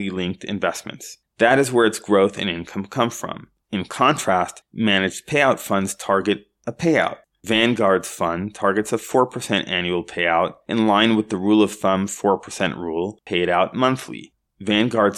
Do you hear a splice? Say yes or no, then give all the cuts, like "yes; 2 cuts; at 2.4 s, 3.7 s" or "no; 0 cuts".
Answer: yes; 1 cut; at 3.6 s